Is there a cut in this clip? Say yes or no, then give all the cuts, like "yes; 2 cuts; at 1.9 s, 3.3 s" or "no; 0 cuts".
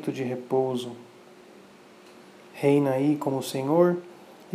no; 0 cuts